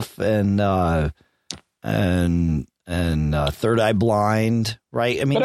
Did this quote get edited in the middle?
no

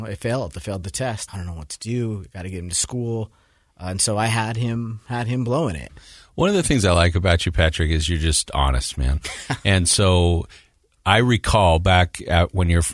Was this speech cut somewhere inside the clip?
yes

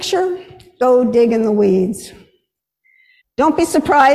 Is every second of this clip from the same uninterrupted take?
no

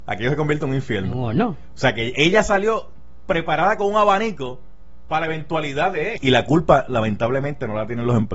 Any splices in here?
yes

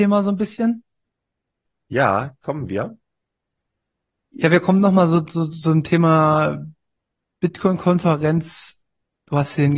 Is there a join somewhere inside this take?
no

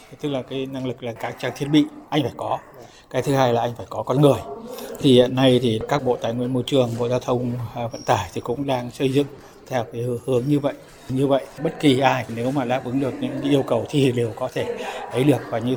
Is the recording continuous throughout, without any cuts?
no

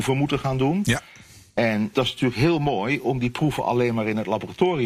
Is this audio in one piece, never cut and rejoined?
no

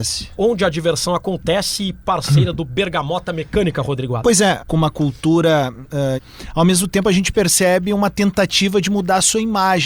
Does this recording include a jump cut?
yes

